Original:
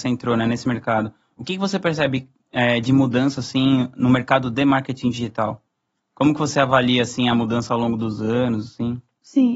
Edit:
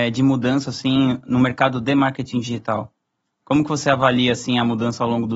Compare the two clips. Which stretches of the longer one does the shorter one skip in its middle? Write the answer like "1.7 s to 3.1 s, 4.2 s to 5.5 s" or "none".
none